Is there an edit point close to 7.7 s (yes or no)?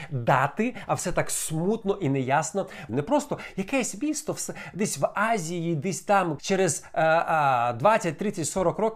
no